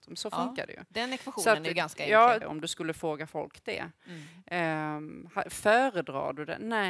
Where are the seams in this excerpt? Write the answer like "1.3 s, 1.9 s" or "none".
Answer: 2.4 s